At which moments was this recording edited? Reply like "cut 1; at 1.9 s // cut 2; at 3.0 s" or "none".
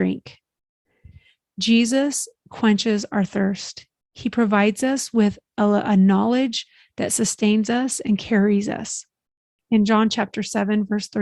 cut 1; at 9.6 s